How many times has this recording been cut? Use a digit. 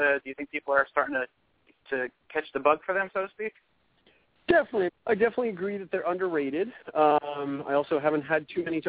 1